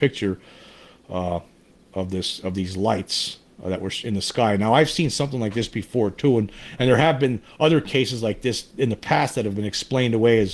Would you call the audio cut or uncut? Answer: uncut